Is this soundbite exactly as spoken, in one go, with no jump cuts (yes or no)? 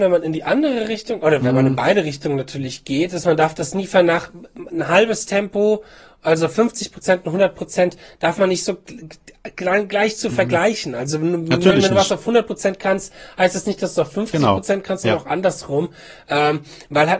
no